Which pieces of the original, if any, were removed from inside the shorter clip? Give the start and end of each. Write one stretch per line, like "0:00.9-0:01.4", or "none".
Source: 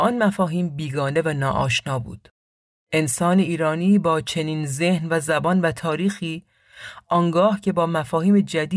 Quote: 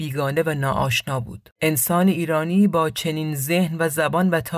0:02.3-0:02.8